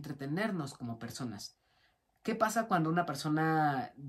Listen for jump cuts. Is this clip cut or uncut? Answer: uncut